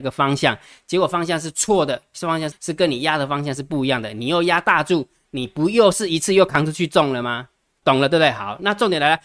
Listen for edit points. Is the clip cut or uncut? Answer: cut